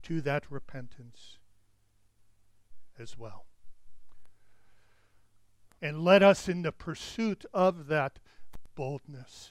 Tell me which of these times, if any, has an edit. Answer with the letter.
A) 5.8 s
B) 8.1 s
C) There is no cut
A